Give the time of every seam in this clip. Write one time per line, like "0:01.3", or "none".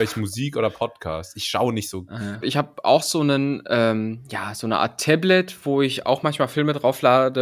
0:02.4